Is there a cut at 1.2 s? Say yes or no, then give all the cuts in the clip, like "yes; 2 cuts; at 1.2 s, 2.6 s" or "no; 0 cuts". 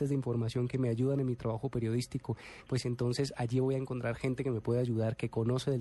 no; 1 cut; at 2.7 s